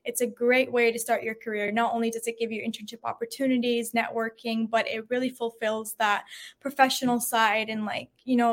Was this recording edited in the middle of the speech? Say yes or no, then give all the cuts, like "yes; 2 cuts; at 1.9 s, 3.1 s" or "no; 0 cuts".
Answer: no; 0 cuts